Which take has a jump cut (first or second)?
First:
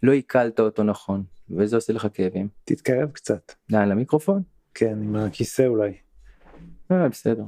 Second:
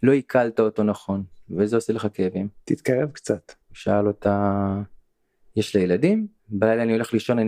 second